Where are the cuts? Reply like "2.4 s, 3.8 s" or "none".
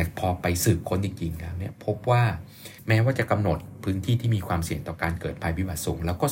2.8 s